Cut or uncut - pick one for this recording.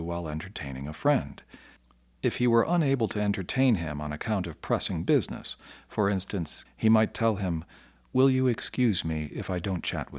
cut